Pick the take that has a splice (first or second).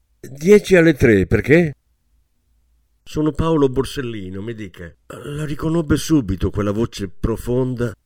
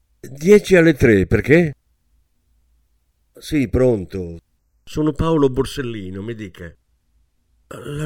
first